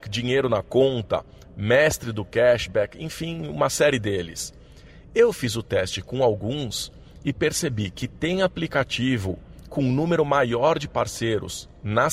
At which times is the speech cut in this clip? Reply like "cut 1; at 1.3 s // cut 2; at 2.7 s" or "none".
none